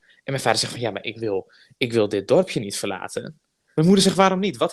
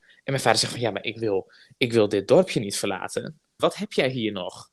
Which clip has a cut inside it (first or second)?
second